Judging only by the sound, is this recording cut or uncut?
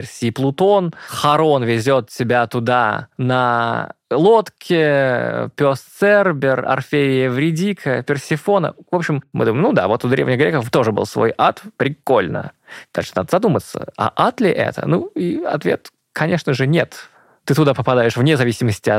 cut